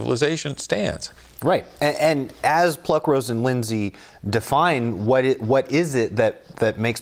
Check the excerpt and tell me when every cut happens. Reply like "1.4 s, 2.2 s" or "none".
none